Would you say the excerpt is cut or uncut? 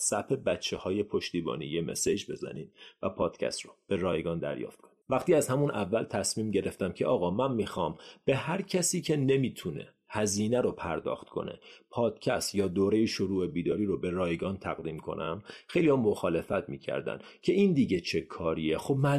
cut